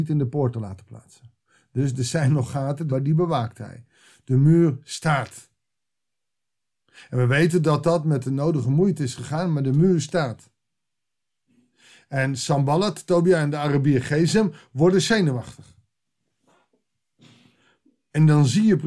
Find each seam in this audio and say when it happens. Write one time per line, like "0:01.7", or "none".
0:02.9